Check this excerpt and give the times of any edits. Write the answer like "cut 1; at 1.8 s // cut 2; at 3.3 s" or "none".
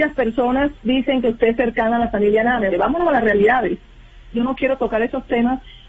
cut 1; at 2.7 s // cut 2; at 4.3 s